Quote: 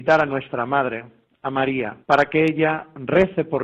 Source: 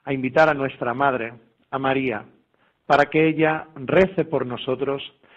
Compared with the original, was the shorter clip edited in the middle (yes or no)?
yes